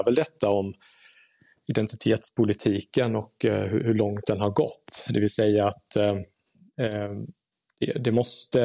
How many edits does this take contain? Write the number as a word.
zero